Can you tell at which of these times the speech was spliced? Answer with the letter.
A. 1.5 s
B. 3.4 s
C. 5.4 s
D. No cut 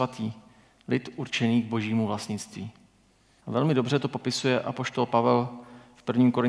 B